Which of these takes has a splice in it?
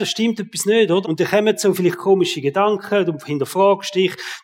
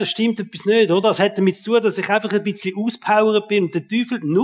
first; 1 cut; at 1.0 s

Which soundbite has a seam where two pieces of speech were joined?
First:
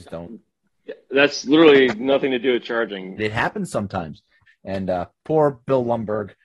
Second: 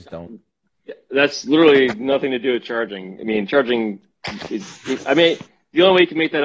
first; 2 cuts; at 3.2 s, 4.5 s

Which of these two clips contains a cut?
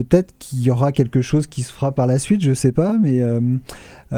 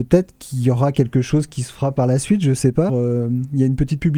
second; 1 cut; at 2.9 s

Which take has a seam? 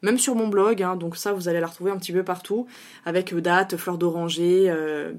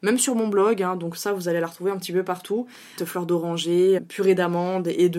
second; 2 cuts; at 3.0 s, 4.0 s

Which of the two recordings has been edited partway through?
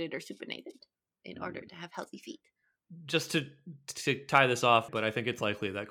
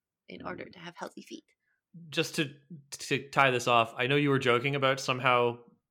first; 1 cut; at 4.9 s

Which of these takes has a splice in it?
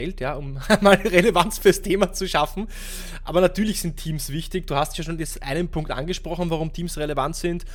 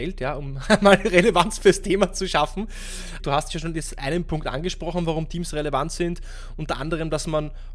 second; 1 cut; at 3.2 s

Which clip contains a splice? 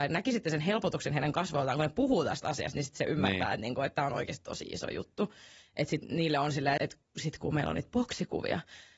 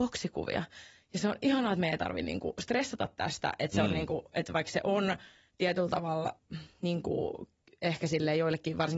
first; 2 cuts; at 5.7 s, 6.8 s

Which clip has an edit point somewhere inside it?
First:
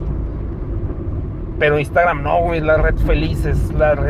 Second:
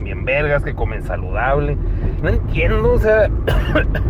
second; 1 cut; at 2.2 s

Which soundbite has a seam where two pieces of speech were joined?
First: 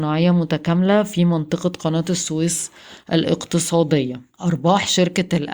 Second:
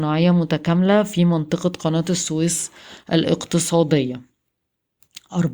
first; 1 cut; at 4.3 s

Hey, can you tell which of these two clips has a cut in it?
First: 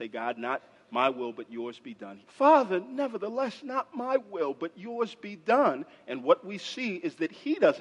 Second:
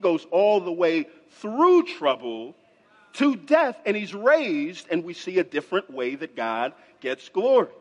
first; 1 cut; at 2.2 s

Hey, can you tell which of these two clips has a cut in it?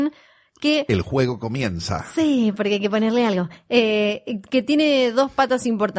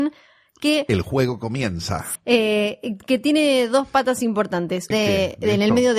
second; 2 cuts; at 2.2 s, 4.9 s

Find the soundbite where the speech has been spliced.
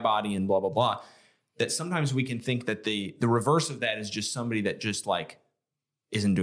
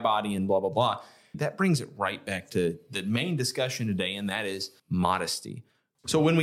second; 2 cuts; at 1.3 s, 4.8 s

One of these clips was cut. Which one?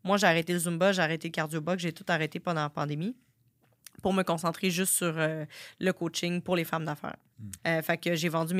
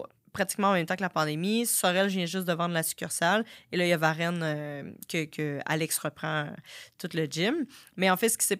first; 1 cut; at 7.6 s

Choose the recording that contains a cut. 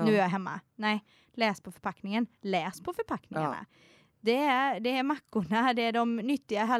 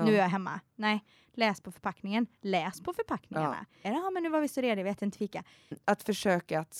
second; 2 cuts; at 3.8 s, 5.7 s

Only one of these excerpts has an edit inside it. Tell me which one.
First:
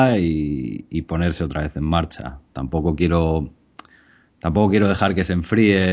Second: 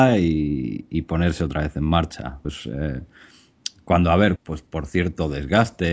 second; 2 cuts; at 2.4 s, 4.4 s

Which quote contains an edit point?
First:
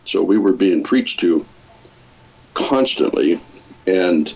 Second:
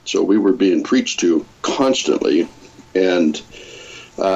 second; 1 cut; at 1.5 s

